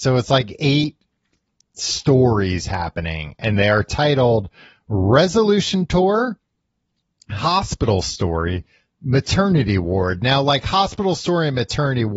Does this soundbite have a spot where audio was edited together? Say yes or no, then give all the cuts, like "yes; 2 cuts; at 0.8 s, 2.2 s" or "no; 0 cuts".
no; 0 cuts